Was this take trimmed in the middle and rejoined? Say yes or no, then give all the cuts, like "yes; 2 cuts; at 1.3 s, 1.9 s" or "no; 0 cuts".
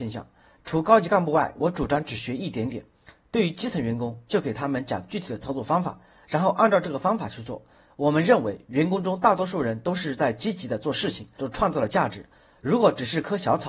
yes; 1 cut; at 11.4 s